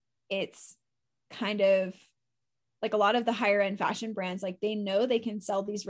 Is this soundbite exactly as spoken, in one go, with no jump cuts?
yes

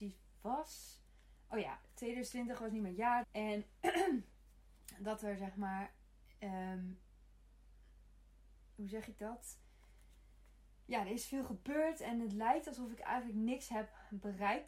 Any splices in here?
yes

